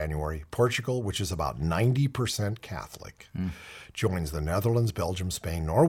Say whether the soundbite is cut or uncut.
uncut